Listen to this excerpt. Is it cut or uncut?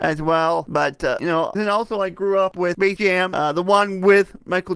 cut